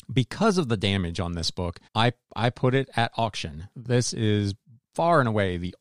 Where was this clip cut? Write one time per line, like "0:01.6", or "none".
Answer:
0:01.9
0:03.7